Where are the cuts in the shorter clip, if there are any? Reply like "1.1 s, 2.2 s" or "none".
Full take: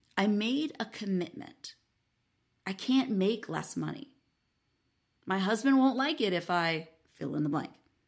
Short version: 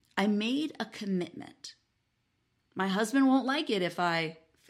2.6 s